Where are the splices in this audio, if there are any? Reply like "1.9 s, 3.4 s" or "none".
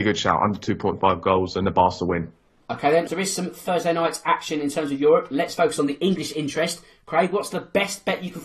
3.1 s